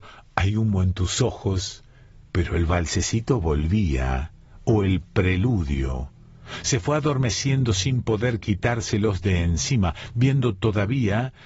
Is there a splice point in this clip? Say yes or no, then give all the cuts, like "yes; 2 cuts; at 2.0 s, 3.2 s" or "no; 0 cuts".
no; 0 cuts